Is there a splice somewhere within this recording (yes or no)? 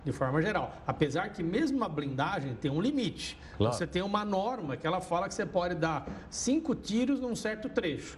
no